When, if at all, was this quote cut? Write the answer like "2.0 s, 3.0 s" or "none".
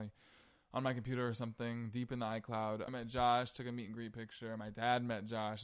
2.9 s